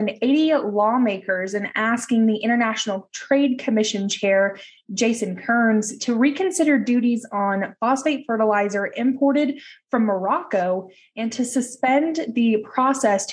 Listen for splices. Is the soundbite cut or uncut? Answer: uncut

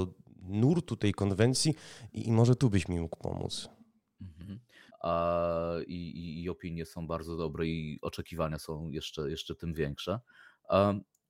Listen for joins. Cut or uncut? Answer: cut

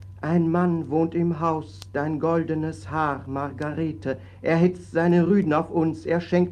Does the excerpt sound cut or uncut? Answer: uncut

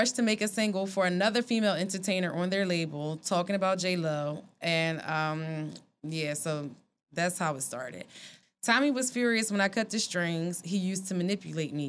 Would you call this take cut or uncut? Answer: cut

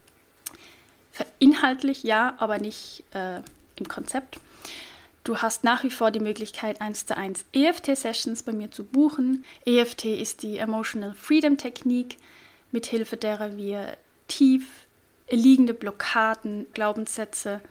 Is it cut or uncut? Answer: cut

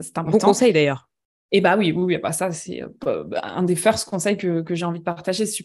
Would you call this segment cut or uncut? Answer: uncut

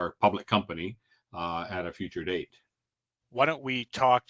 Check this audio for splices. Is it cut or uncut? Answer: uncut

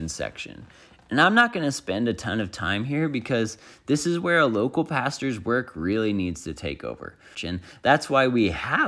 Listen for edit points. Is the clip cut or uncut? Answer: cut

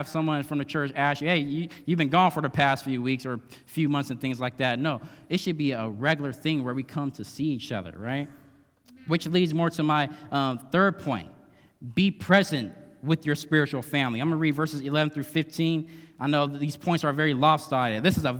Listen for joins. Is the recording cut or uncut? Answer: uncut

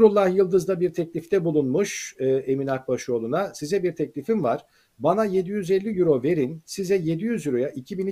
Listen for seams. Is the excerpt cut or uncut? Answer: uncut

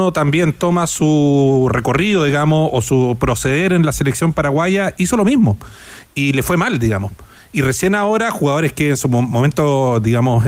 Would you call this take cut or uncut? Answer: uncut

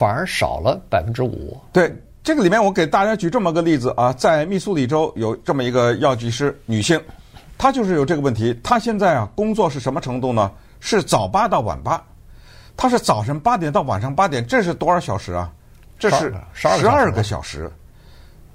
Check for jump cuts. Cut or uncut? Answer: uncut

